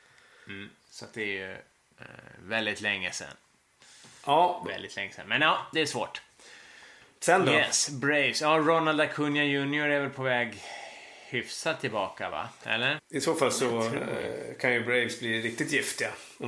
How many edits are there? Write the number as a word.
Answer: one